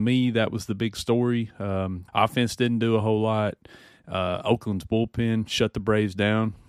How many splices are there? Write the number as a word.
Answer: one